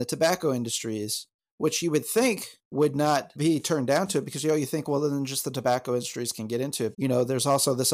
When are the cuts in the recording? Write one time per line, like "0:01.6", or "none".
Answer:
0:03.4
0:06.9